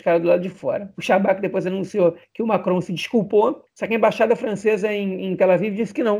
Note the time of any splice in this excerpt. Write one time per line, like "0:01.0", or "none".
none